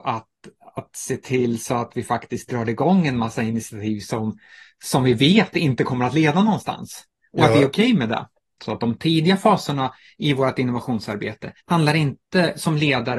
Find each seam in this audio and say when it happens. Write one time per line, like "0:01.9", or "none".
0:08.6
0:11.6